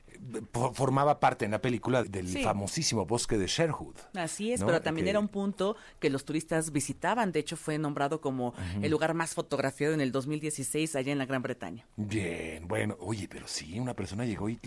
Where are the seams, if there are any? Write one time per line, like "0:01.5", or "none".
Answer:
0:02.0